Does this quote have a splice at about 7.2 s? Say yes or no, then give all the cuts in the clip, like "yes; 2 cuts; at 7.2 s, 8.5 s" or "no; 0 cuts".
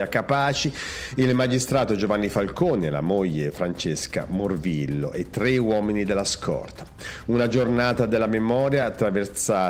no; 0 cuts